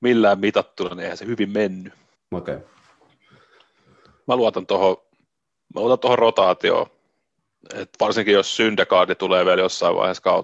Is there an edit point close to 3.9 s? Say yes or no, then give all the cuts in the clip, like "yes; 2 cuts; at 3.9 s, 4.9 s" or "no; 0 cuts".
no; 1 cut; at 2.1 s